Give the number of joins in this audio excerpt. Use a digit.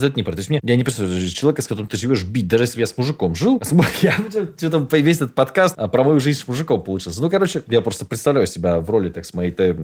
0